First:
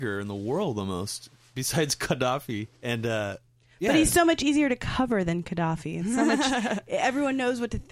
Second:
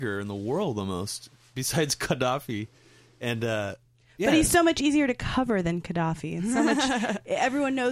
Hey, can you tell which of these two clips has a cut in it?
first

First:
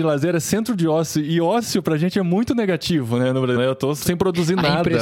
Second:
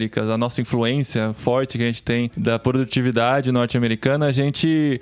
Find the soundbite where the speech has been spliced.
first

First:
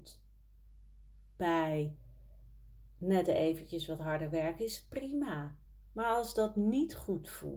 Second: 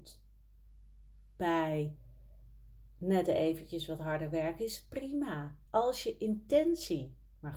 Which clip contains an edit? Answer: second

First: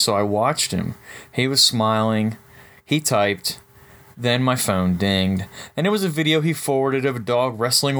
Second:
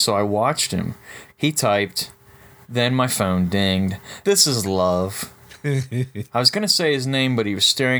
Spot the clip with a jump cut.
second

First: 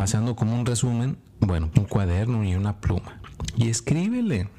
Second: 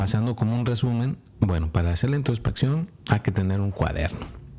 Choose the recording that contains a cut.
first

